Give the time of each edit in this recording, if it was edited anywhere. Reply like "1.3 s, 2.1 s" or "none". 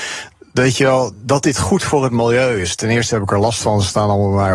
1.1 s